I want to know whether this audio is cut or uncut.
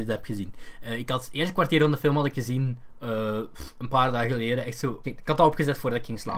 cut